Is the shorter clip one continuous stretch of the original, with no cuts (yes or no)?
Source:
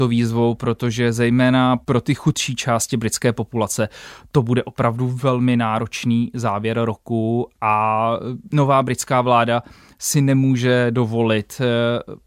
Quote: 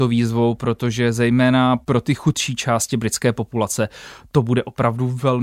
yes